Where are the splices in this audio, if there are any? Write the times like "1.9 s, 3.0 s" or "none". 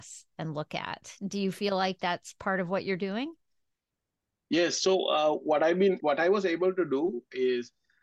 none